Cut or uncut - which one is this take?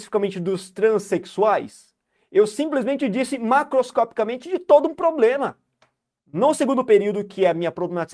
cut